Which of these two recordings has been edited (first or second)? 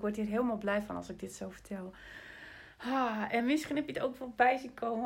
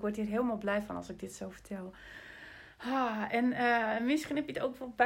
first